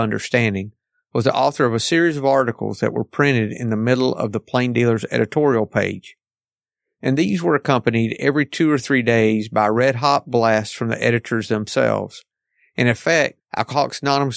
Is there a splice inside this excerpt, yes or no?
yes